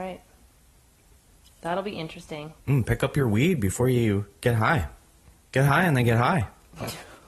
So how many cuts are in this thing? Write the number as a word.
one